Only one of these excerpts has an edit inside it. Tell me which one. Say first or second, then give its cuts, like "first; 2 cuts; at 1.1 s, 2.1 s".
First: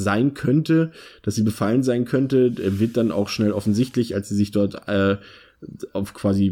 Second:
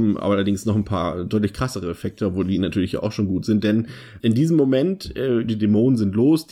second; 2 cuts; at 4.2 s, 5.5 s